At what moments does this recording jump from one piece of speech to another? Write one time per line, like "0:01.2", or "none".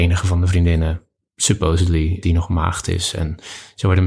0:02.2

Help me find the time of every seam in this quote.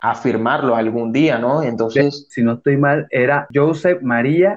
none

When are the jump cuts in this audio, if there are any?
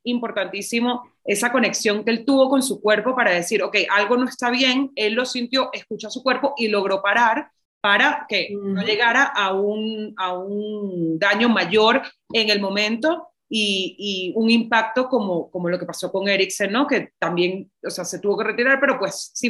none

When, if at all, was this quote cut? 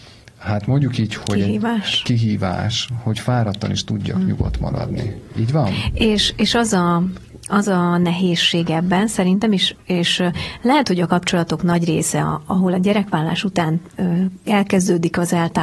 none

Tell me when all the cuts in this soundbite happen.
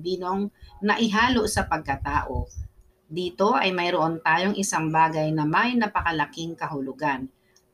0:02.9

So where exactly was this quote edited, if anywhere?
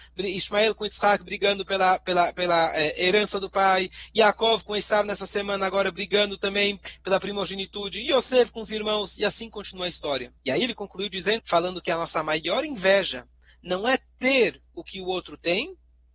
0:10.4
0:11.4

